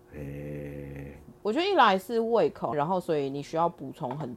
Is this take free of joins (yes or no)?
no